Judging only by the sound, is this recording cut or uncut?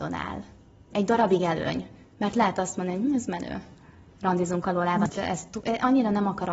cut